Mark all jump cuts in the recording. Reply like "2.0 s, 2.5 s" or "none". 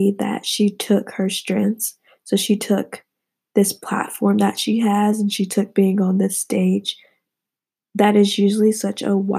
none